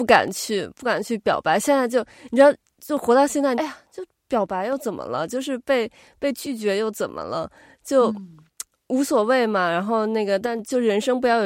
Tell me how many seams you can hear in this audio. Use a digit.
1